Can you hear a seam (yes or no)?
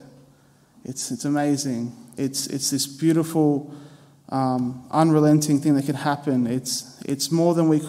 yes